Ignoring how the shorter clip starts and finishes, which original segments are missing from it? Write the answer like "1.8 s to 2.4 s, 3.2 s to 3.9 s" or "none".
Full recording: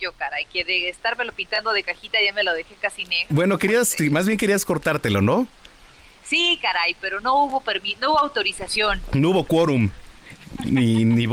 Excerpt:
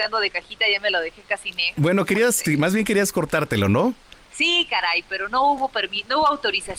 5.8 s to 6.2 s